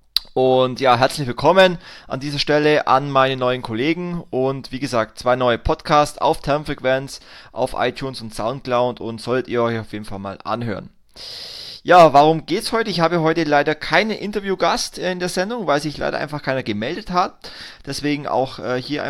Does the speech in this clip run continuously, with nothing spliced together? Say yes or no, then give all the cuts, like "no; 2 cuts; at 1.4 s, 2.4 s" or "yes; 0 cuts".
yes; 0 cuts